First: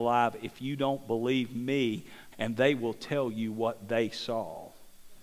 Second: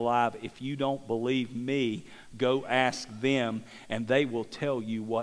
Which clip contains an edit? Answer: first; 1 cut; at 2.3 s

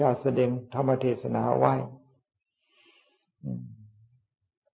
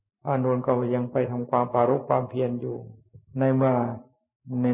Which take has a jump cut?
second; 1 cut; at 3.3 s

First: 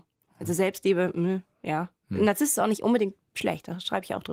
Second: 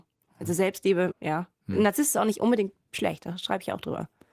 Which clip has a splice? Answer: second; 1 cut; at 1.1 s

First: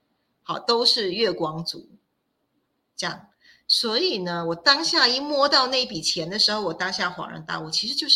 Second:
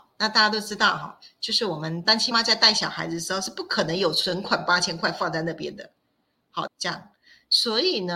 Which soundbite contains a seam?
second; 2 cuts; at 2.3 s, 6.7 s

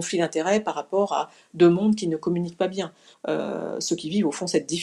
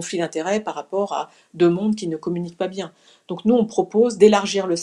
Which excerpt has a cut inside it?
first; 1 cut; at 3.1 s

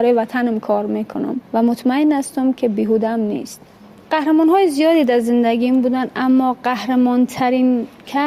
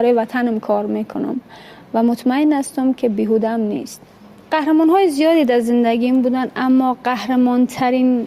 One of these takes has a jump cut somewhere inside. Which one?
first; 1 cut; at 1.4 s

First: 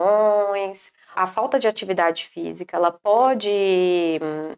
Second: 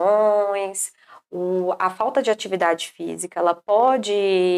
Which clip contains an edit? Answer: first; 1 cut; at 1.1 s

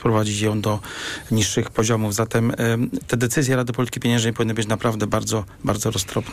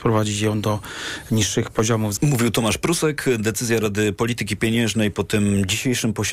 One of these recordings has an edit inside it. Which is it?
second; 1 cut; at 2.2 s

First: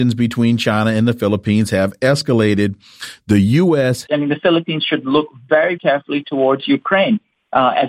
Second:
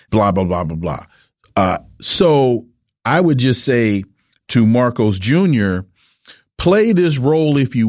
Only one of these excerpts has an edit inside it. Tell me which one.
first; 2 cuts; at 4.1 s, 5.8 s

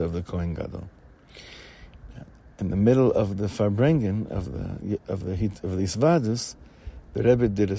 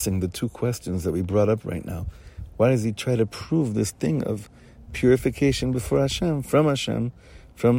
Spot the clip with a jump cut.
second; 1 cut; at 2.5 s

